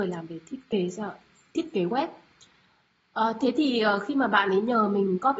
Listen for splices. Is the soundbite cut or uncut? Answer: uncut